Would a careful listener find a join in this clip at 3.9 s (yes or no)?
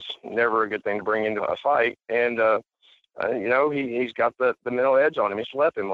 no